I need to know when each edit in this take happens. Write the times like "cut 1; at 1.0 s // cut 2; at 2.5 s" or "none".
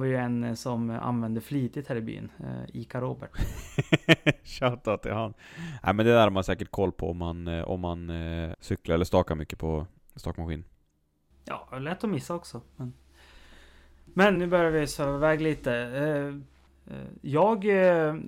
cut 1; at 8.5 s // cut 2; at 14.4 s

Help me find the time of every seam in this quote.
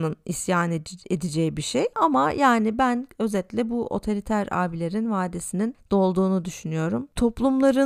cut 1; at 1.9 s

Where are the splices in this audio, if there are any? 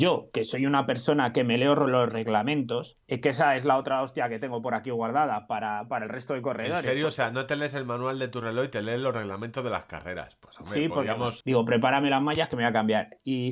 cut 1; at 3.0 s // cut 2; at 11.4 s

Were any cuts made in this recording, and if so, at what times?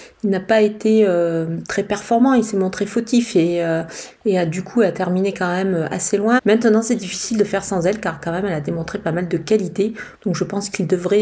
cut 1; at 6.4 s // cut 2; at 10.1 s

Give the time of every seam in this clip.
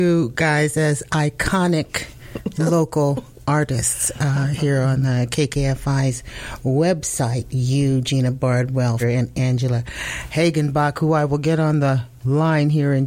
cut 1; at 9.0 s

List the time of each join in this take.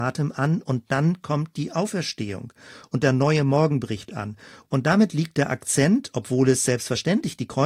cut 1; at 4.6 s

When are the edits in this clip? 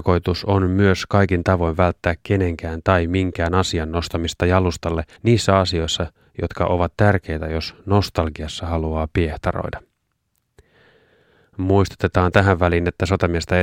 cut 1; at 5.2 s

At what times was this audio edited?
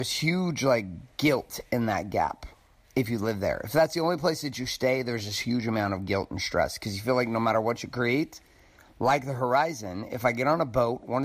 none

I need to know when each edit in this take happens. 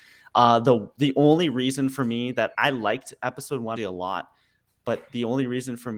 cut 1; at 2.5 s // cut 2; at 3.8 s

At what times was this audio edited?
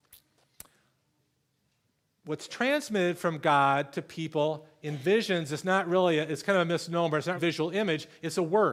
cut 1; at 7.3 s

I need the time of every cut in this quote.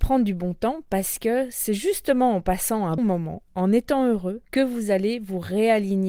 cut 1; at 3.0 s // cut 2; at 4.4 s

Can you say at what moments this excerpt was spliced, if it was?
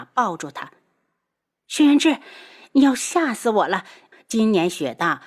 cut 1; at 4.1 s

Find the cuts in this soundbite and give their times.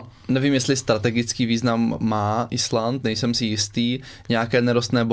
none

